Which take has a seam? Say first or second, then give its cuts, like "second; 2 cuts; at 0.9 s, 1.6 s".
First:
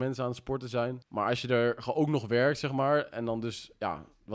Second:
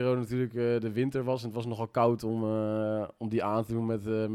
first; 1 cut; at 1.0 s